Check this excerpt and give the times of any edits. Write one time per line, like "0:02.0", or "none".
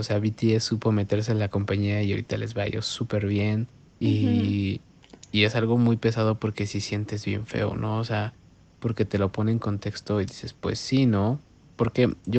0:03.8